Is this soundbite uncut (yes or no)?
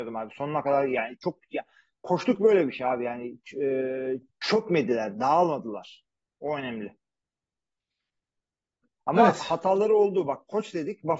yes